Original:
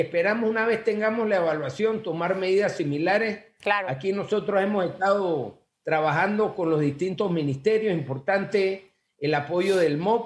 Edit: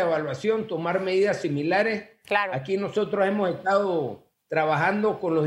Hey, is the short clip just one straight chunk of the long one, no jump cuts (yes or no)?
yes